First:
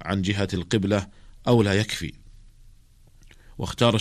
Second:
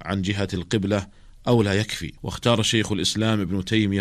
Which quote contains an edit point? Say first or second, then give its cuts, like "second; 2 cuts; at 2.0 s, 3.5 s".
second; 1 cut; at 2.2 s